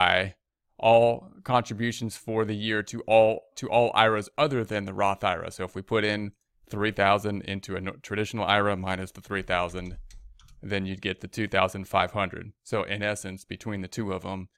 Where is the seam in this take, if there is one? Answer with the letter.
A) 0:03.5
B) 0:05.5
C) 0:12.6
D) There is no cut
A